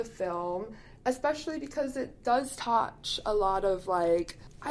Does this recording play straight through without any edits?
yes; 0 cuts

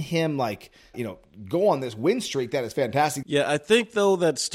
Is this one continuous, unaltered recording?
no; 2 cuts; at 0.9 s, 3.2 s

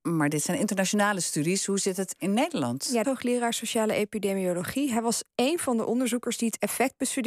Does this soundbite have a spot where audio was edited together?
yes; 1 cut; at 3.0 s

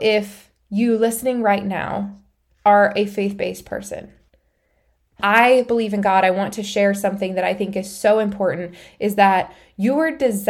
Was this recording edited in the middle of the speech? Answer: no; 0 cuts

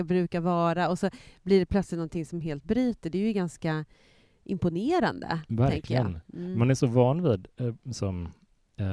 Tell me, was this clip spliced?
no; 0 cuts

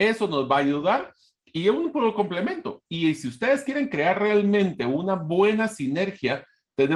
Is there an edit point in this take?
no; 0 cuts

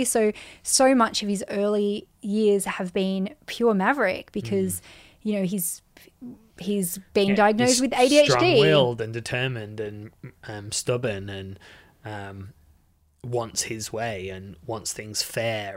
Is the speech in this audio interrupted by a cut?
no; 0 cuts

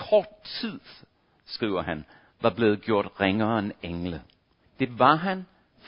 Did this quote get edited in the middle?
yes; 1 cut; at 4.6 s

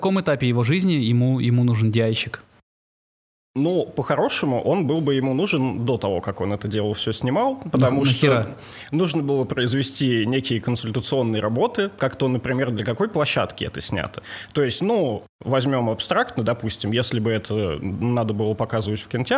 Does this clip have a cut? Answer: no; 0 cuts

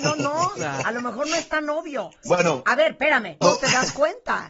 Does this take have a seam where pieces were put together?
yes; 2 cuts; at 2.2 s, 3.4 s

